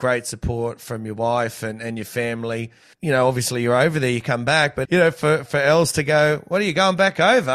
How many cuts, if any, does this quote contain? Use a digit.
2